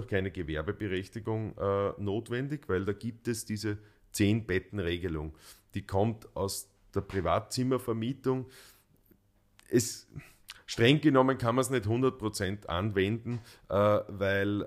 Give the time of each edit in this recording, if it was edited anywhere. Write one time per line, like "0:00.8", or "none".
none